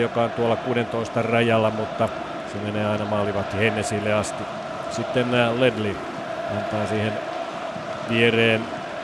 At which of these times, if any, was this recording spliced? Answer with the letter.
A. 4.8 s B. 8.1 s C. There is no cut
B